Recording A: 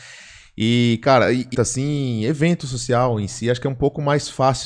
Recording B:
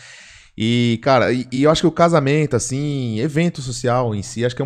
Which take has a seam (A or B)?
A